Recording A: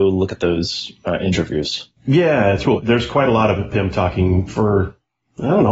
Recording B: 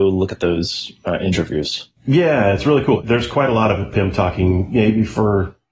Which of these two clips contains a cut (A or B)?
A